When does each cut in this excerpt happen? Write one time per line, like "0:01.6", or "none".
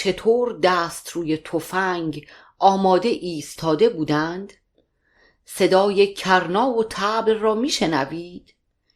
none